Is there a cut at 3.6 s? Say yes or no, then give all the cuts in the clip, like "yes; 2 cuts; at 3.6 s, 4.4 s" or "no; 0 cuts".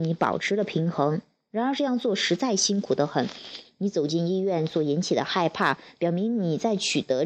yes; 1 cut; at 3.6 s